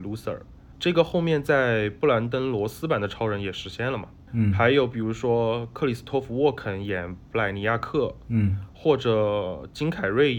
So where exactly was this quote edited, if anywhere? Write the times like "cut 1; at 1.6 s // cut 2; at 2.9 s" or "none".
none